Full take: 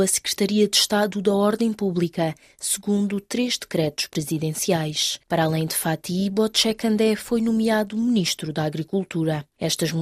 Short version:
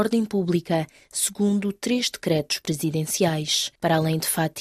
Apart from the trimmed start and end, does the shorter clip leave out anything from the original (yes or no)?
no